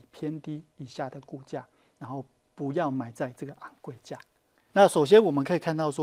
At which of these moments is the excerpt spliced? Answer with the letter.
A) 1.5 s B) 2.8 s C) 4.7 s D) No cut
C